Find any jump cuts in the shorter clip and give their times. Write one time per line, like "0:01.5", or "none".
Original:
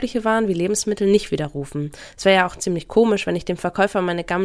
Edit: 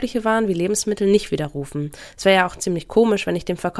none

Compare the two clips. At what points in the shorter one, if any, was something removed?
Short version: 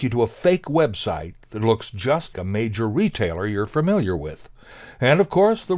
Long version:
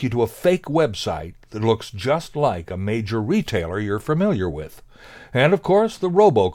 0:02.3

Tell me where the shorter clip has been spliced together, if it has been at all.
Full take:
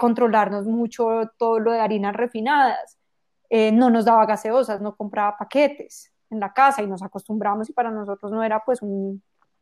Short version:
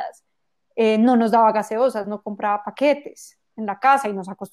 none

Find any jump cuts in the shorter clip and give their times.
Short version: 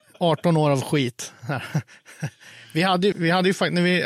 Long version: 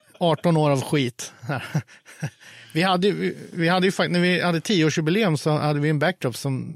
0:03.1

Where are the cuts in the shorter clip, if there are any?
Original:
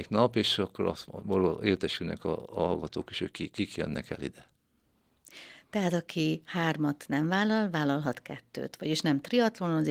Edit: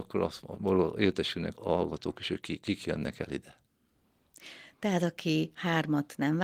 0:01.5

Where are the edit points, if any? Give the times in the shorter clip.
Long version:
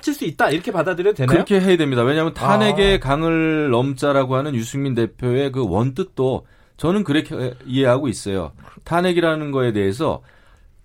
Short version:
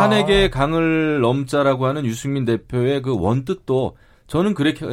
none

